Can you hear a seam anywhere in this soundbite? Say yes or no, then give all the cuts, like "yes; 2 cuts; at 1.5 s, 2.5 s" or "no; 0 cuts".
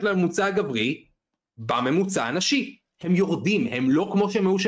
no; 0 cuts